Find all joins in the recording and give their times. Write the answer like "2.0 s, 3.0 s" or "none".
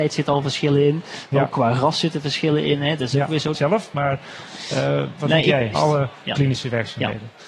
3.5 s, 5.7 s